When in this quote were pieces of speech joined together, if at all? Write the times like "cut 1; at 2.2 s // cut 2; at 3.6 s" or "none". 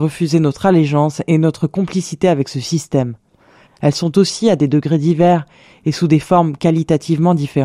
cut 1; at 3.7 s